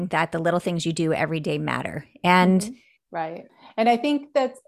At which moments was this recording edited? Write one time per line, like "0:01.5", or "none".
0:03.0